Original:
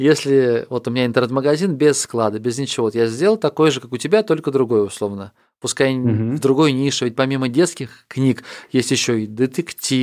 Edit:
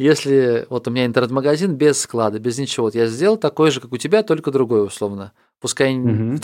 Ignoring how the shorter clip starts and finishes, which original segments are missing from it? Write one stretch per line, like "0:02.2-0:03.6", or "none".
none